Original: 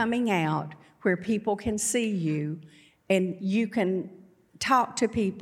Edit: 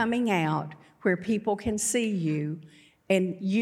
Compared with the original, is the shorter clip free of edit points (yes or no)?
yes